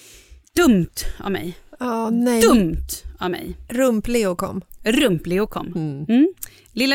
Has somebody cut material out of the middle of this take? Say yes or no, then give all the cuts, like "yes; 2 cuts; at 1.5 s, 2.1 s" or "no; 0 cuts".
no; 0 cuts